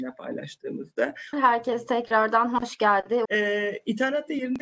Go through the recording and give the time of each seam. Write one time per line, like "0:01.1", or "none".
0:01.3
0:03.3